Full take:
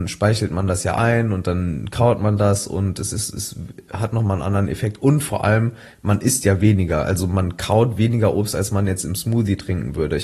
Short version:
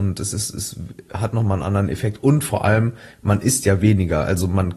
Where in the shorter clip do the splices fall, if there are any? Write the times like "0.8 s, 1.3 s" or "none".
none